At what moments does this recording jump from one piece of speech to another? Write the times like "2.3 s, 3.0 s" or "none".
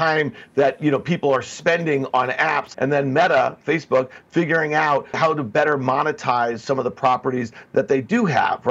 2.7 s, 5.1 s